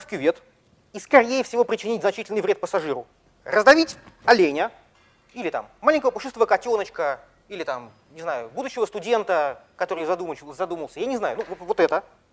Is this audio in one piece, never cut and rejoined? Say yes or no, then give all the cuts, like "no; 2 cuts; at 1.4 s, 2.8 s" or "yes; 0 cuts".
yes; 0 cuts